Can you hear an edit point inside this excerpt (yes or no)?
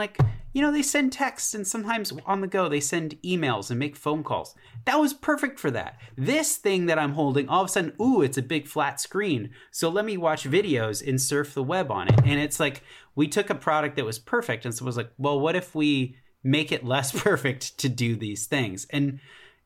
no